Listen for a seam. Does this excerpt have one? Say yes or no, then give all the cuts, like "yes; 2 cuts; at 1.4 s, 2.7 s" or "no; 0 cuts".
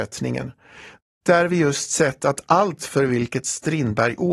no; 0 cuts